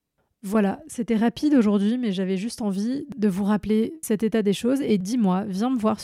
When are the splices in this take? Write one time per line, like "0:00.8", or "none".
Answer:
0:04.0